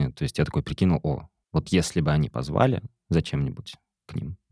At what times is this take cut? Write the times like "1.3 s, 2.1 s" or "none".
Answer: 1.4 s